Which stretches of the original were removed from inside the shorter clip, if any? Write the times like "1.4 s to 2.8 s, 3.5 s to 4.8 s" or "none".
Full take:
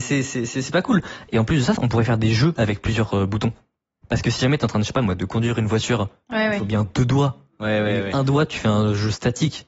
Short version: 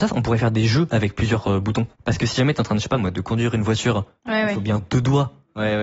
3.6 s to 4.0 s